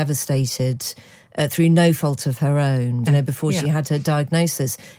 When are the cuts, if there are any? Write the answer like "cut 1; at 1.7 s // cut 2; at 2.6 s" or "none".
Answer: cut 1; at 3.1 s